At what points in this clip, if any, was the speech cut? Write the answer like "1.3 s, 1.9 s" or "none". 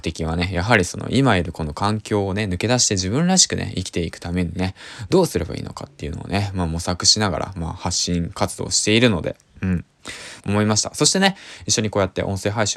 10.4 s